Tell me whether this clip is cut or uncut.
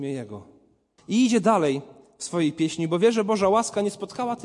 cut